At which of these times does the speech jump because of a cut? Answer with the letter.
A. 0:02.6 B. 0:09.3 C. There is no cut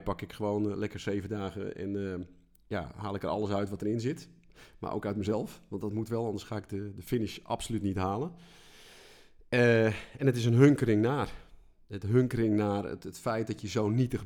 C